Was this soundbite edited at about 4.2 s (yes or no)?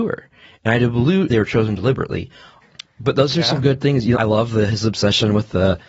yes